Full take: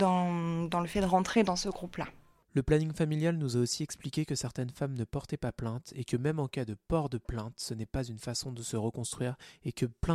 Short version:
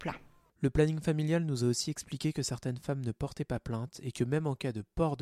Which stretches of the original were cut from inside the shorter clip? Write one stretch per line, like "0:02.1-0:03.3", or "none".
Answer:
none